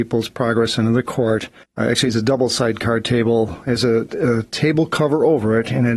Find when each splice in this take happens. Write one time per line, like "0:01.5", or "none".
0:01.6